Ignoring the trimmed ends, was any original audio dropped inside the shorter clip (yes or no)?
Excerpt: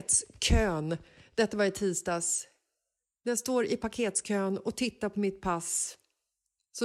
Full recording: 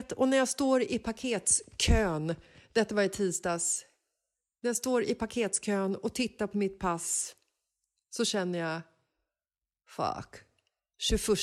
no